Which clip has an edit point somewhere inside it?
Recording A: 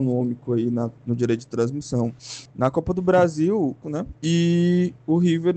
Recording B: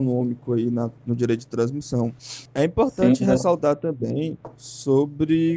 A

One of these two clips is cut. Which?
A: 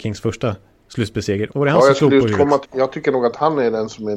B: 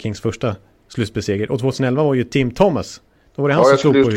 A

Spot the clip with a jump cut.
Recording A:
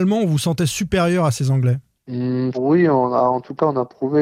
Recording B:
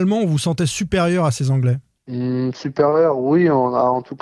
A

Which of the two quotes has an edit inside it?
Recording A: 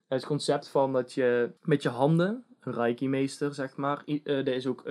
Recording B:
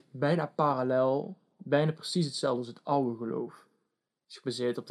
A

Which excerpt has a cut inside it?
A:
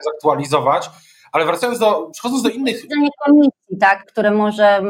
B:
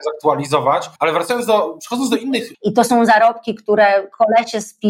B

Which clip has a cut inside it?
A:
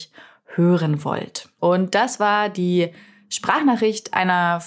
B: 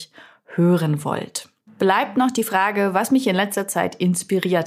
A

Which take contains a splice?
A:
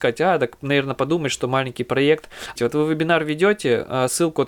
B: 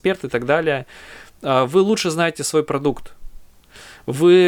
A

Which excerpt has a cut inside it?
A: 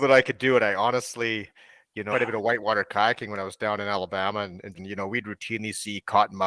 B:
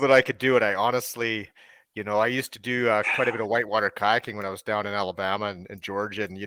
A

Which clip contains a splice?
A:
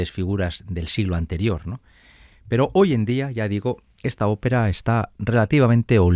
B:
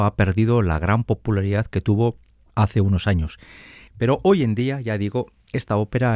B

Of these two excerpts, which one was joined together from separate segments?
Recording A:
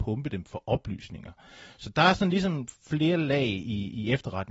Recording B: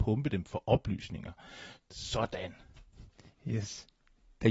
B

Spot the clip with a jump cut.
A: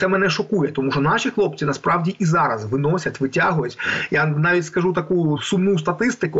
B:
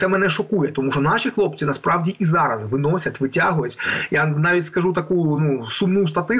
A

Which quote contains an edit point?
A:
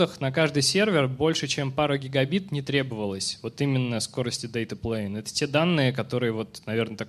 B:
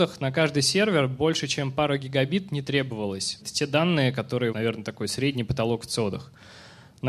B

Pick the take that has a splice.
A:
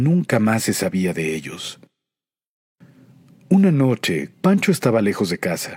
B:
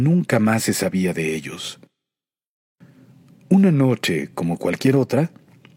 A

